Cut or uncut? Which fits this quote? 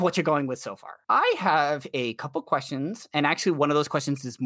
uncut